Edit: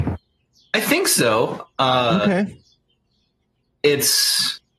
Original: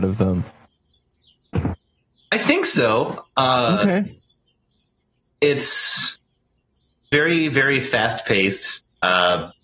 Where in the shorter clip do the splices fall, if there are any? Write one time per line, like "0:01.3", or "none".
none